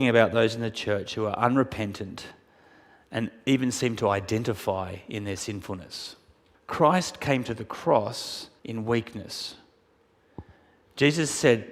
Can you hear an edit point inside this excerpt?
yes; 2 cuts; at 6.5 s, 8.6 s

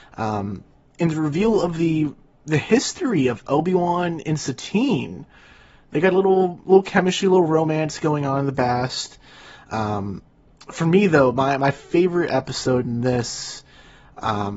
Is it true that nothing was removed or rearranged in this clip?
yes; 0 cuts

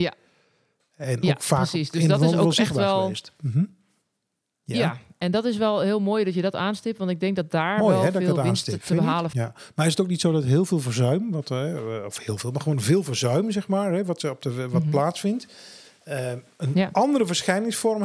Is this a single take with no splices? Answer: no; 1 cut; at 9.3 s

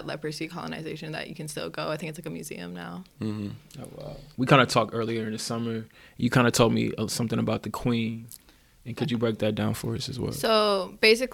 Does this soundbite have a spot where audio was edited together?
yes; 1 cut; at 4.3 s

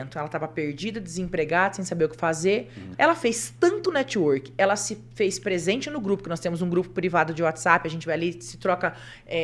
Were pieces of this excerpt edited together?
yes; 1 cut; at 2.9 s

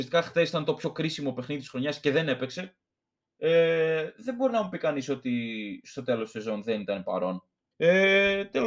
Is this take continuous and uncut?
no; 1 cut; at 7.7 s

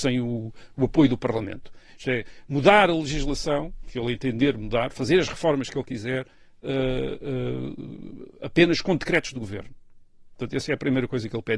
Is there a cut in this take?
no; 0 cuts

